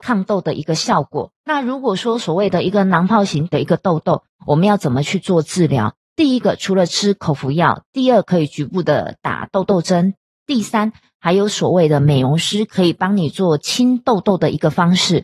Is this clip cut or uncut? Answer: uncut